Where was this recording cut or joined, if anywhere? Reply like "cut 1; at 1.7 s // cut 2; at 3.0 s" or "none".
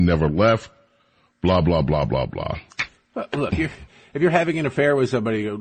cut 1; at 3.5 s